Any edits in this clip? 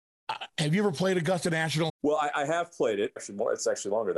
yes; 2 cuts; at 1.9 s, 3.2 s

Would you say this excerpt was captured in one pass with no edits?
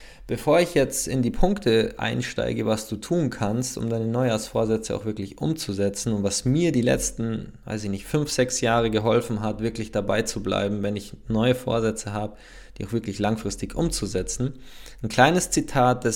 yes; 0 cuts

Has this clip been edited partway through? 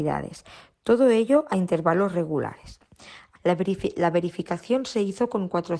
yes; 1 cut; at 3.4 s

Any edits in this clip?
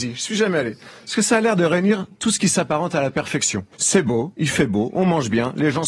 yes; 1 cut; at 3.7 s

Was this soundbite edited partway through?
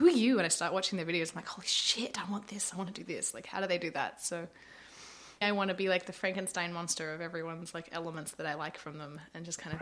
yes; 1 cut; at 5.4 s

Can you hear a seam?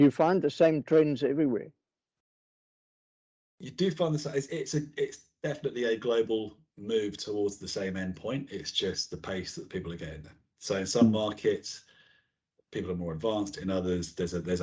no; 0 cuts

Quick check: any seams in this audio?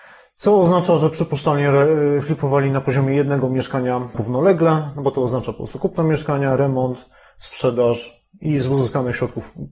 no; 0 cuts

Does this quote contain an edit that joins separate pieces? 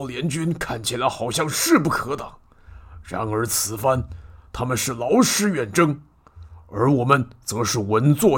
no; 0 cuts

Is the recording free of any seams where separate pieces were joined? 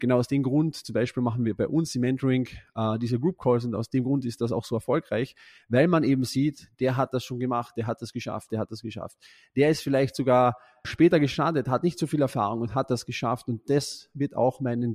no; 2 cuts; at 8.5 s, 10.8 s

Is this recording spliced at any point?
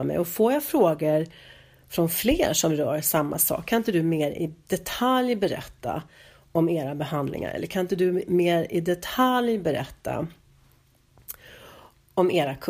no; 0 cuts

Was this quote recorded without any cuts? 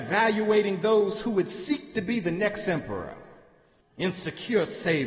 no; 1 cut; at 3.8 s

